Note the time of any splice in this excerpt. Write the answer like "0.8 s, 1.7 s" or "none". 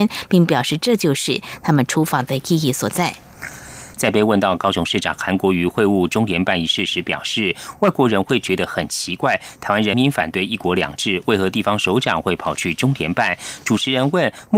3.9 s, 9.9 s